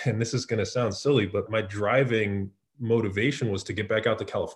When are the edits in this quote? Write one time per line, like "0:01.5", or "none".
0:01.5